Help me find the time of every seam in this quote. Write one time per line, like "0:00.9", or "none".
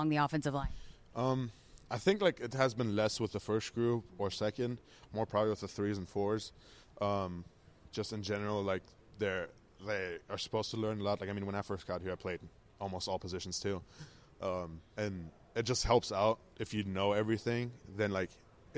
none